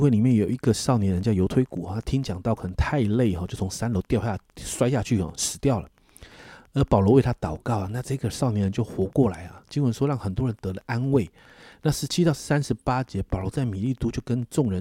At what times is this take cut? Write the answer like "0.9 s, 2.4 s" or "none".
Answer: none